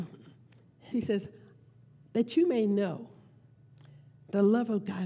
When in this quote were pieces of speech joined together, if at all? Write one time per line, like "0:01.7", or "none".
0:00.9